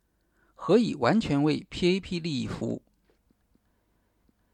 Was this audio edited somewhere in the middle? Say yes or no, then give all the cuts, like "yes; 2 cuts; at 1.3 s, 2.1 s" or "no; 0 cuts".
no; 0 cuts